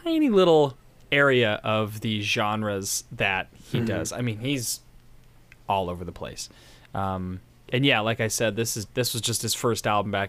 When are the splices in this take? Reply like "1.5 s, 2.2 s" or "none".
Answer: 8.9 s